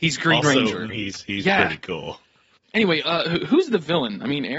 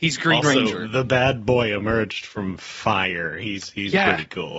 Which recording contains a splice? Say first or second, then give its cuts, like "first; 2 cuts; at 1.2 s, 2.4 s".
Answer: first; 2 cuts; at 0.9 s, 2.6 s